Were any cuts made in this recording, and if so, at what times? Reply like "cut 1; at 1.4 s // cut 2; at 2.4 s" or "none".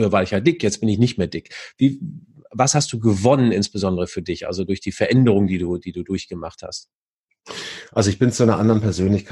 none

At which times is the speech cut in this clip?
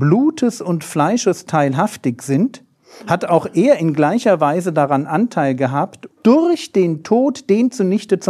cut 1; at 6.1 s

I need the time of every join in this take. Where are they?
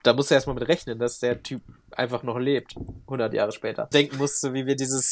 cut 1; at 3.9 s

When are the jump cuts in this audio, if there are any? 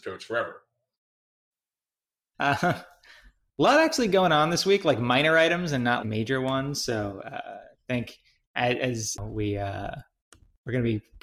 cut 1; at 2.3 s // cut 2; at 6.0 s // cut 3; at 9.2 s

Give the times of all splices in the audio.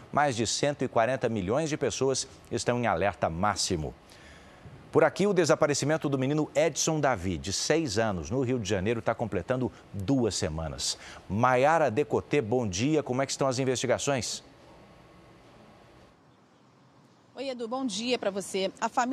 none

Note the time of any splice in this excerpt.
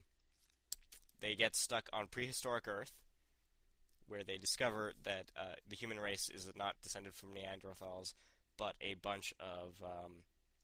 cut 1; at 6.7 s

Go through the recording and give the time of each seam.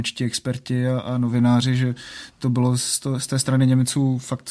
none

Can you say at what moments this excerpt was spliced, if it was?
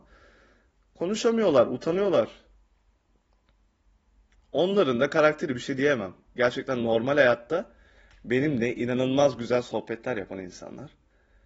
none

